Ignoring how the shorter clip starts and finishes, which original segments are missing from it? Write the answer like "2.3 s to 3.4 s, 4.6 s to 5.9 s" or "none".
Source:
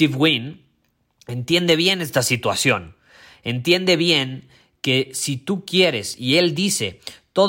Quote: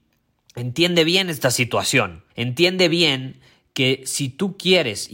3.0 s to 3.4 s